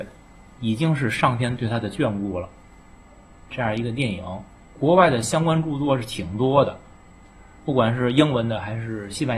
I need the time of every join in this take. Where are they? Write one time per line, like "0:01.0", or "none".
0:04.6